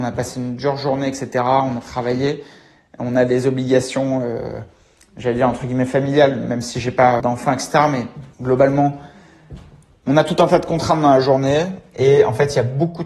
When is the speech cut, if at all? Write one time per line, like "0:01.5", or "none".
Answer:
0:07.2
0:08.3